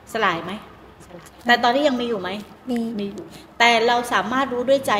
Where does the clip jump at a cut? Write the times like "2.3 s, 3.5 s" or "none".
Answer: none